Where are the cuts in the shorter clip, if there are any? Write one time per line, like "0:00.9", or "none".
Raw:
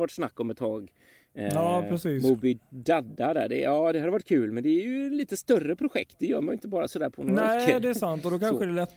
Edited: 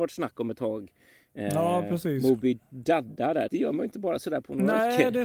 0:03.5